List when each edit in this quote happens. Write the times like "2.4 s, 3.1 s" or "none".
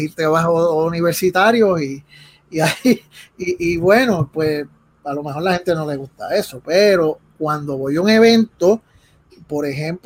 none

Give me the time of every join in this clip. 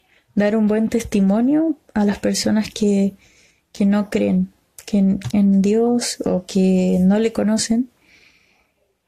5.3 s

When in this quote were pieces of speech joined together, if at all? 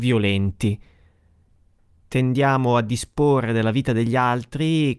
none

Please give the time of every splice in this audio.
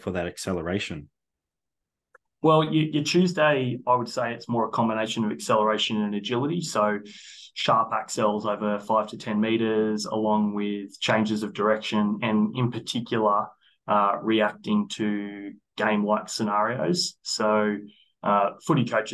none

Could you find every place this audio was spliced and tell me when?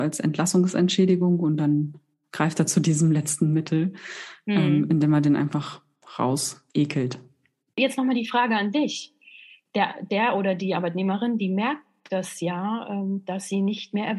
6.7 s

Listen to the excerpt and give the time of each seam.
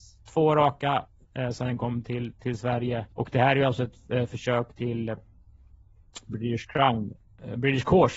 3.1 s

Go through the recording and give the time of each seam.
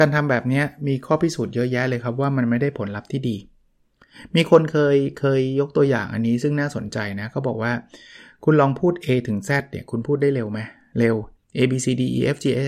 none

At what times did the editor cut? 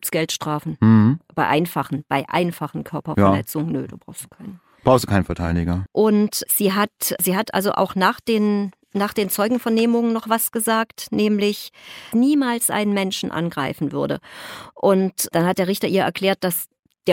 5.9 s, 12.1 s

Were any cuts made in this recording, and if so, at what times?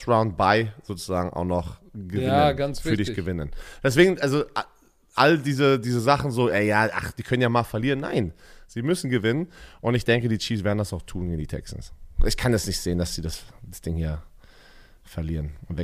none

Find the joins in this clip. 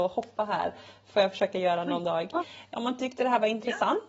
2.7 s

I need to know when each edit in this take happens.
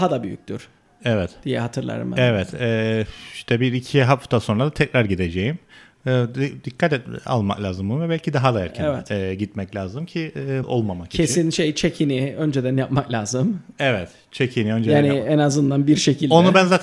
10.6 s

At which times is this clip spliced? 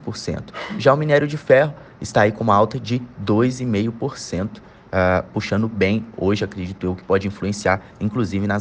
none

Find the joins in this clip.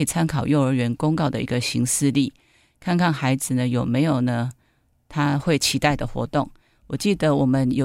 6.7 s

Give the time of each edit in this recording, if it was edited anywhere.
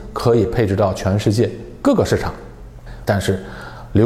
3.0 s

